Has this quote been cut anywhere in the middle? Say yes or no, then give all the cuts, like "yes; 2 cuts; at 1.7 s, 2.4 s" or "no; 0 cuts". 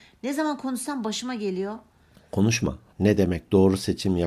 yes; 1 cut; at 2.9 s